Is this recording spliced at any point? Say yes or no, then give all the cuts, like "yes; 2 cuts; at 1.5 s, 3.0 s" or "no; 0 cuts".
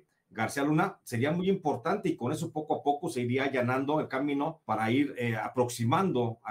yes; 1 cut; at 4.6 s